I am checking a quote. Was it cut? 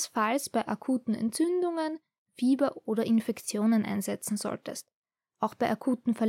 no; 0 cuts

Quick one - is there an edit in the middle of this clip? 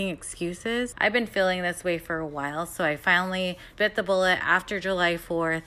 yes; 2 cuts; at 0.9 s, 3.7 s

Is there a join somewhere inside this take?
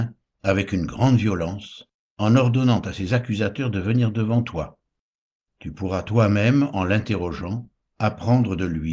no; 0 cuts

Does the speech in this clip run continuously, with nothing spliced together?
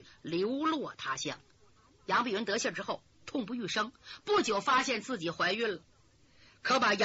yes; 0 cuts

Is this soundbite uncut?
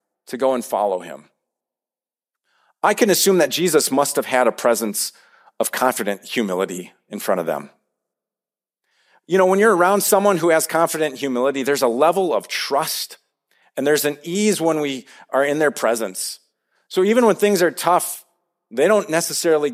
yes; 0 cuts

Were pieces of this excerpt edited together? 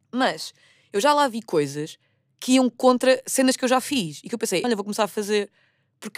yes; 1 cut; at 4.6 s

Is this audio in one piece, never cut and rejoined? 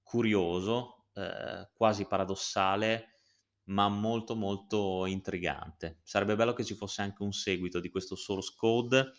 yes; 0 cuts

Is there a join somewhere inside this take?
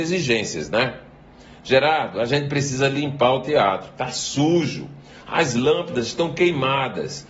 no; 0 cuts

